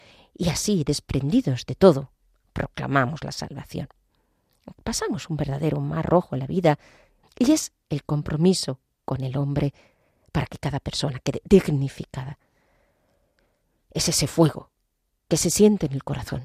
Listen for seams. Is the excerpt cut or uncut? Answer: cut